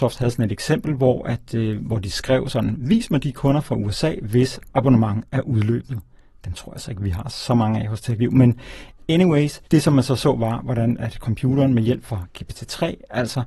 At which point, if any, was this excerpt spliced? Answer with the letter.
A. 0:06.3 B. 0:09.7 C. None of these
B